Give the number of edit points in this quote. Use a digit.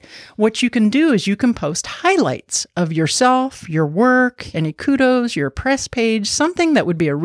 1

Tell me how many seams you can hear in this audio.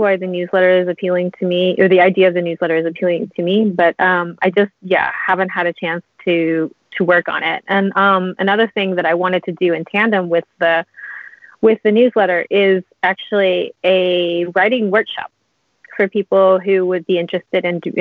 0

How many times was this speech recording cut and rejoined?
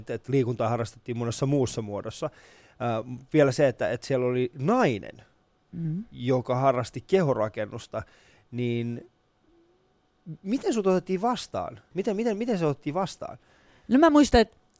1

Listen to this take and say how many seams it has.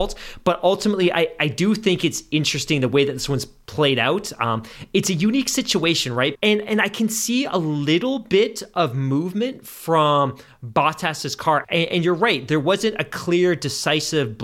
2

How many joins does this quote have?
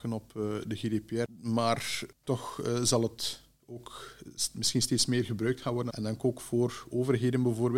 1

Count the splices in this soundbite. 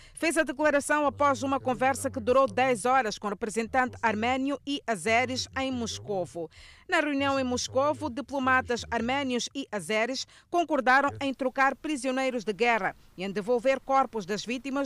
0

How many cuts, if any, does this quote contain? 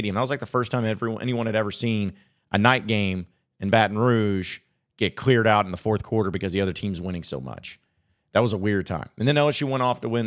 0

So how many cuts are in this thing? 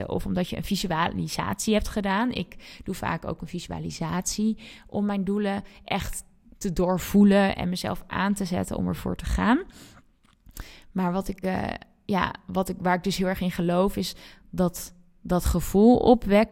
0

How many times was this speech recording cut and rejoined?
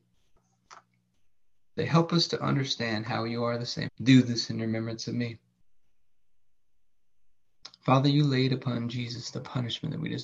2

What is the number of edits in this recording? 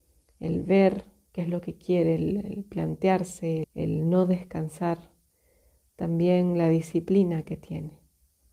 1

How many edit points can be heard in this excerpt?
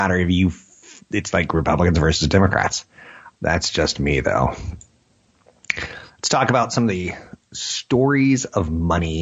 1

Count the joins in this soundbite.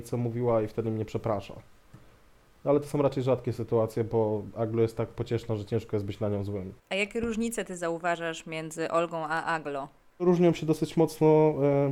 1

